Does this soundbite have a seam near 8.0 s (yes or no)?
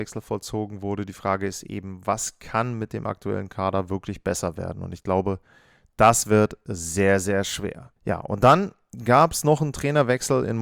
yes